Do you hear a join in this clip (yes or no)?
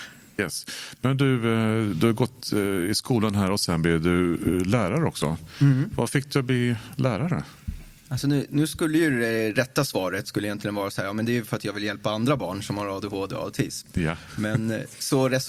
no